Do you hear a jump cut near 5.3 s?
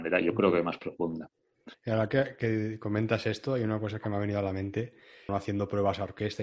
yes; 2 cuts; at 1.7 s, 5.3 s

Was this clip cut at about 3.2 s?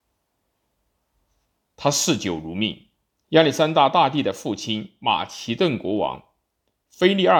yes; 1 cut; at 3.2 s

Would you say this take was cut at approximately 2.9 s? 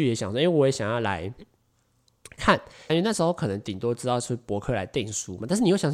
yes; 1 cut; at 2.9 s

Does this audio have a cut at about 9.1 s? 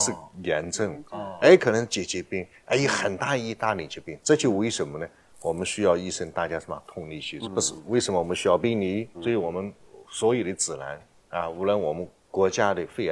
yes; 2 cuts; at 7.4 s, 9.1 s

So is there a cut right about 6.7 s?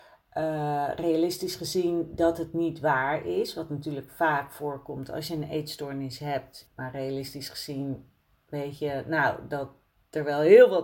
yes; 1 cut; at 6.7 s

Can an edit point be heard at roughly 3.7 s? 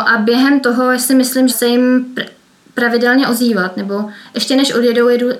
no; 1 cut; at 1.5 s

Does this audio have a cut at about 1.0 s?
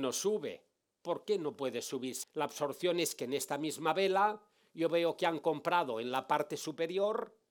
no; 1 cut; at 2.2 s

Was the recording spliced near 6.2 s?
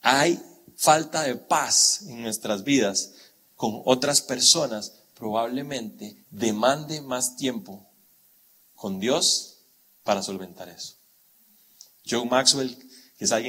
yes; 1 cut; at 6.2 s

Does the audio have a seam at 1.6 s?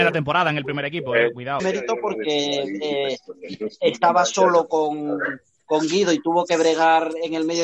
yes; 1 cut; at 1.6 s

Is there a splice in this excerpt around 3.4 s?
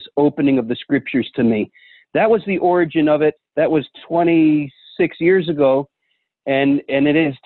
yes; 1 cut; at 3.4 s

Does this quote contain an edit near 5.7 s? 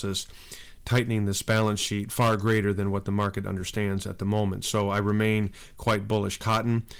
no; 0 cuts

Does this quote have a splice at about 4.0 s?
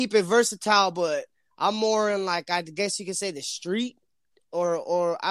no; 0 cuts

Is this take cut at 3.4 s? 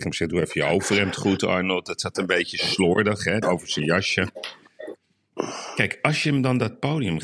yes; 1 cut; at 3.4 s

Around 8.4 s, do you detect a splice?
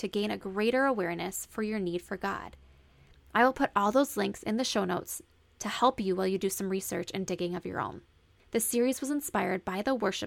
yes; 1 cut; at 8.4 s

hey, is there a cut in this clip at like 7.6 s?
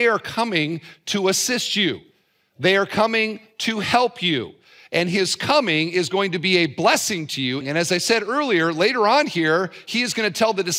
yes; 1 cut; at 7.6 s

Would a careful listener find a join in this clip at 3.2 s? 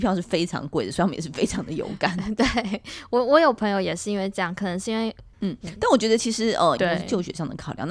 no; 2 cuts; at 5.3 s, 6.8 s

